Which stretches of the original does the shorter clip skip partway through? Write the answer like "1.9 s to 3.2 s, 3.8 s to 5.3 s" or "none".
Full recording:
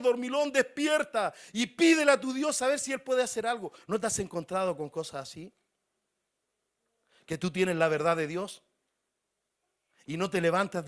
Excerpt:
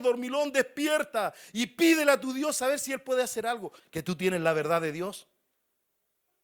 3.8 s to 7.1 s